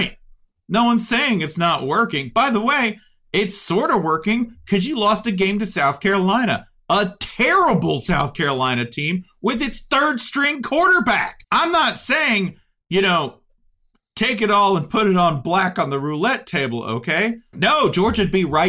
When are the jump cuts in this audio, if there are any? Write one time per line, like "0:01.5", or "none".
0:11.4
0:17.5